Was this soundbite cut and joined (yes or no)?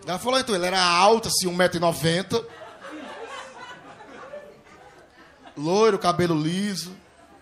no